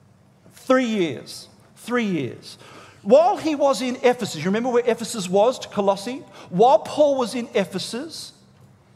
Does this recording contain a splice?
no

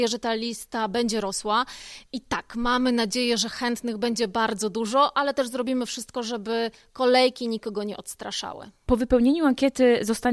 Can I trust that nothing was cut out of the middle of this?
yes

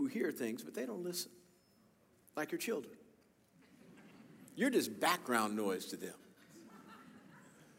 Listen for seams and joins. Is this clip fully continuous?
yes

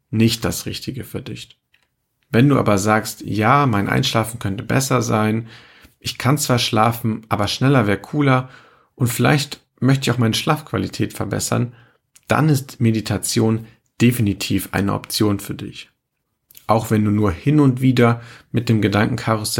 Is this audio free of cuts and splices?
yes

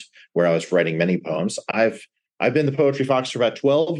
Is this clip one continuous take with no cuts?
yes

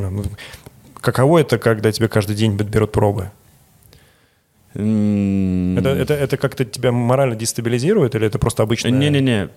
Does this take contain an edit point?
no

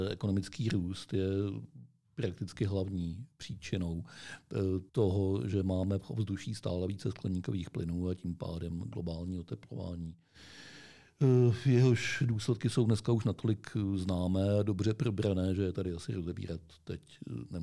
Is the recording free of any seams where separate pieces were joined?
no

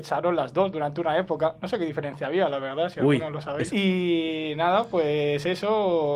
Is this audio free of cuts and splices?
no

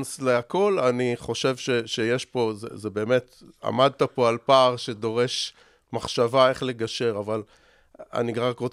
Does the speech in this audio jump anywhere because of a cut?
no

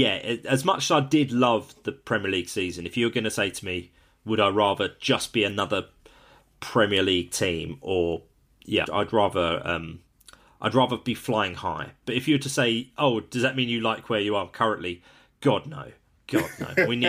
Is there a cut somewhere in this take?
yes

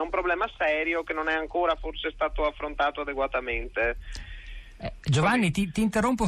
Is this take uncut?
no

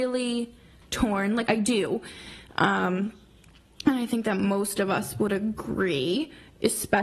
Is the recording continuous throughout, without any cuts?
no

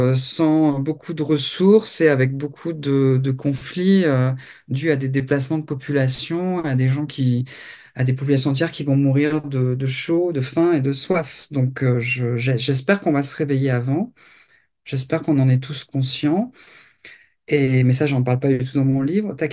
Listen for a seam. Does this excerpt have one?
no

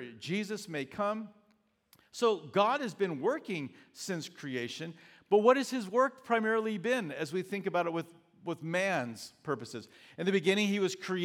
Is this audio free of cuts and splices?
yes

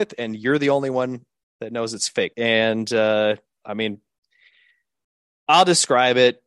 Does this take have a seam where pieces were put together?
yes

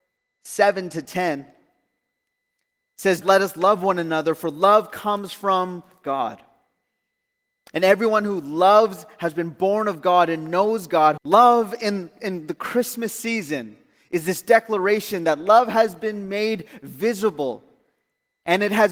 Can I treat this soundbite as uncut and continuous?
no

